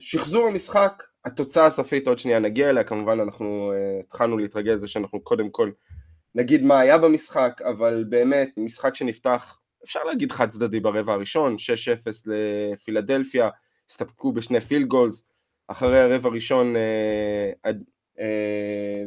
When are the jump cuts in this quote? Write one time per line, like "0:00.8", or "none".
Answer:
0:08.6
0:18.0